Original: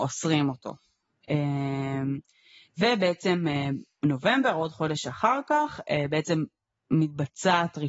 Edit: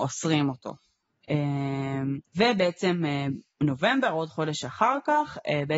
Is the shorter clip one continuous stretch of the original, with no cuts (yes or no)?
no